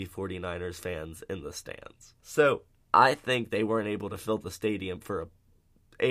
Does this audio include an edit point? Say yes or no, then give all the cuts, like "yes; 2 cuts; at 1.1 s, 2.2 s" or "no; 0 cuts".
yes; 1 cut; at 2.2 s